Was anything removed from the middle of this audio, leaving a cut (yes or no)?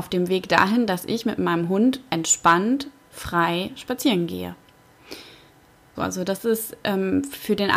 yes